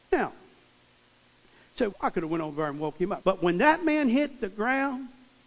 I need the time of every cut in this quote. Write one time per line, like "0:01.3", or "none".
0:01.9
0:03.2

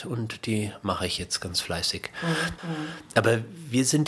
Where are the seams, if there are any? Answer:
0:02.6

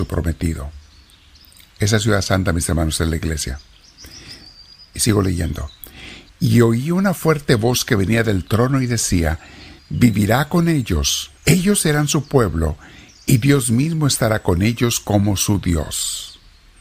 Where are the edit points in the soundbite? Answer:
0:09.8
0:11.4

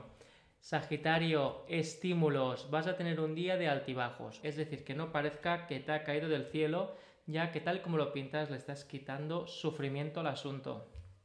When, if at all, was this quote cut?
0:04.4

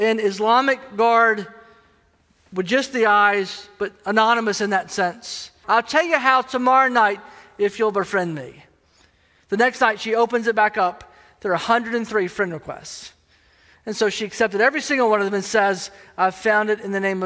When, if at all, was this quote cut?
0:05.6

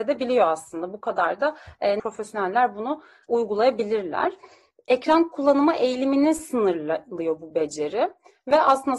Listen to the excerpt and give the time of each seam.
0:02.0

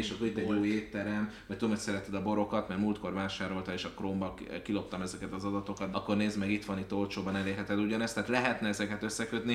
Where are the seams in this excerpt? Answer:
0:05.9

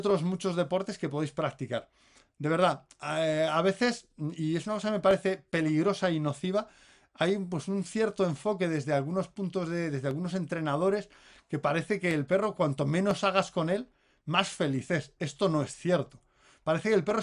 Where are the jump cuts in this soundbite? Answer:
none

